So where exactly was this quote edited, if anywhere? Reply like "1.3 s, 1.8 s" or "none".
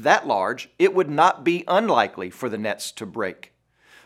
none